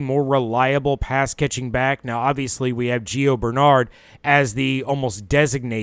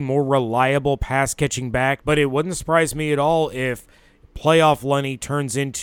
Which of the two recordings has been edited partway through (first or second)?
second